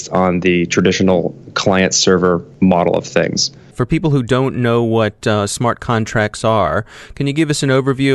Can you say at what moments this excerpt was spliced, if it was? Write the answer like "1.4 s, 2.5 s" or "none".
none